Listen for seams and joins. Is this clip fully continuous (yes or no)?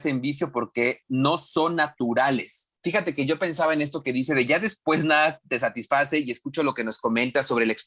no